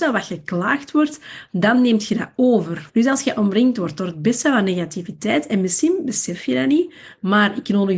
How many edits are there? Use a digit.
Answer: 1